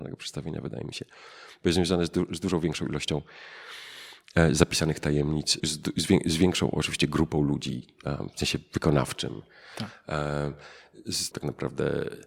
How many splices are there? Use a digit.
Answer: 2